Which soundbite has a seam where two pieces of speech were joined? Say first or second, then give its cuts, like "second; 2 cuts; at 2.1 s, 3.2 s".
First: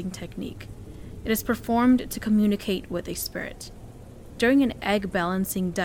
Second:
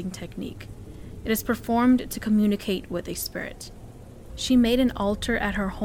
second; 1 cut; at 4.3 s